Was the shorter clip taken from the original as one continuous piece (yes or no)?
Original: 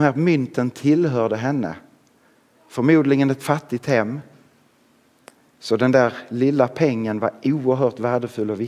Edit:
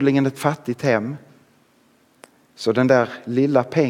yes